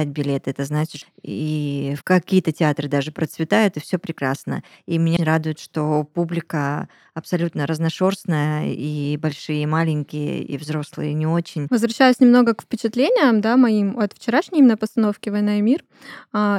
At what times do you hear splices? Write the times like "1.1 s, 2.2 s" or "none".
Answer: 1.0 s, 5.2 s